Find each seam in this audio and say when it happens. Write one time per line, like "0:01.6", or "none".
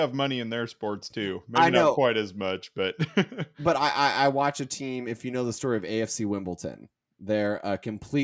none